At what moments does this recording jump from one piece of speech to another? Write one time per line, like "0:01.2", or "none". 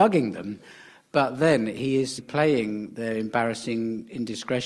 none